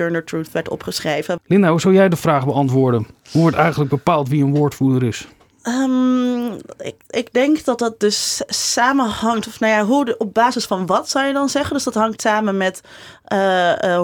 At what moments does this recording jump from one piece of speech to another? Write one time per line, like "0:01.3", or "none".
0:01.4

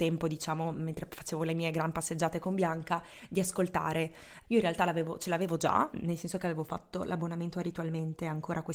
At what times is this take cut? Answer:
0:04.4

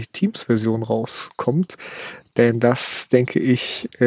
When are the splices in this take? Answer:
none

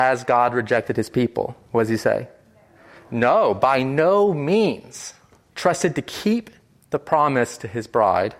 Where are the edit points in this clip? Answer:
0:05.5

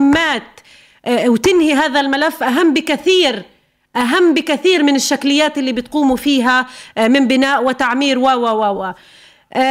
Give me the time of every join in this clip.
0:08.7

